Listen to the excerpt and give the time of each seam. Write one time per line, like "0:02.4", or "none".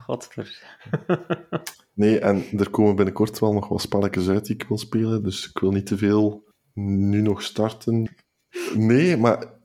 0:08.1